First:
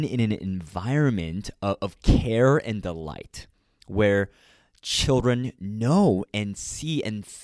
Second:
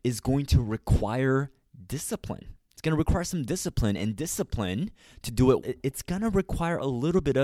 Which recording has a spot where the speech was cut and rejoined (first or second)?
second